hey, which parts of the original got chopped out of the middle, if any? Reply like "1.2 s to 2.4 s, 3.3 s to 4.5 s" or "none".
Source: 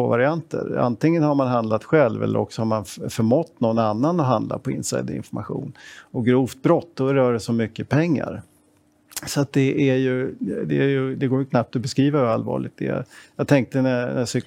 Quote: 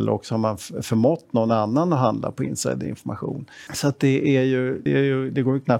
5.9 s to 9.2 s, 10.4 s to 10.7 s